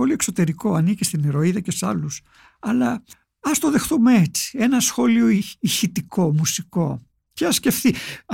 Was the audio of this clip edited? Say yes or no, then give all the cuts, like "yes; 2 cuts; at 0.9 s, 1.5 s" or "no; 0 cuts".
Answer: no; 0 cuts